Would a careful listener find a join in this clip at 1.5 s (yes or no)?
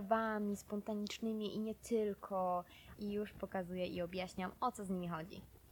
no